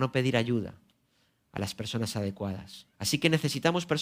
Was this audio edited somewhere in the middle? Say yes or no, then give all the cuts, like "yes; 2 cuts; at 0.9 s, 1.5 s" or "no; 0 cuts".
yes; 1 cut; at 2.9 s